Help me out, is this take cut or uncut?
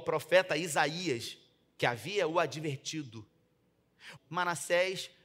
cut